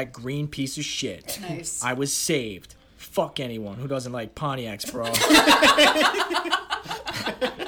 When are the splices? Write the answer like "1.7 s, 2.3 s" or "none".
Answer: none